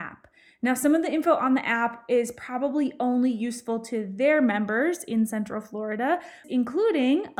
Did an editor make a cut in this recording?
yes; 1 cut; at 6.4 s

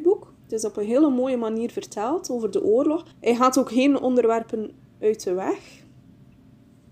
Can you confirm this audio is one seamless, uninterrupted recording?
no; 1 cut; at 3.1 s

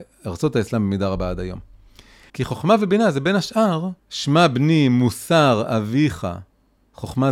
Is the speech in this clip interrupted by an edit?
yes; 2 cuts; at 2.3 s, 4.0 s

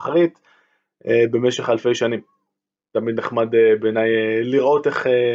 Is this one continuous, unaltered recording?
yes; 0 cuts

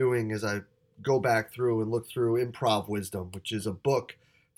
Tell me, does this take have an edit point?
no; 0 cuts

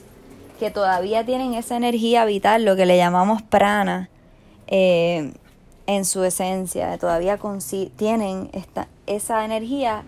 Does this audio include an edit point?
yes; 1 cut; at 9.0 s

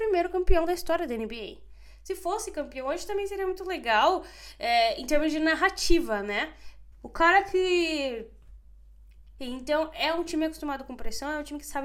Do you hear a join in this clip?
yes; 2 cuts; at 6.9 s, 9.4 s

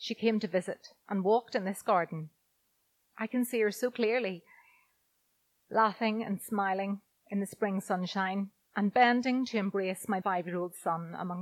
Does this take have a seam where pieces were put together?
yes; 1 cut; at 10.2 s

